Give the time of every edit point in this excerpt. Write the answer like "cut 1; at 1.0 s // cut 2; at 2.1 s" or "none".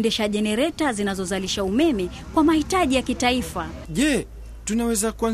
cut 1; at 3.8 s